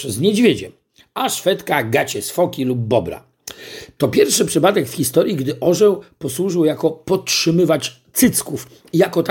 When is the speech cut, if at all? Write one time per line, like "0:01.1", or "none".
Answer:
0:04.0